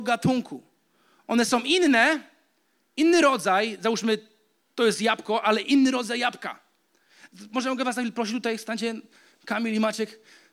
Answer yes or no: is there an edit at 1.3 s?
no